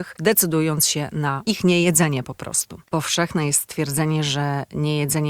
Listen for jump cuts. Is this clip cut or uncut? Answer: cut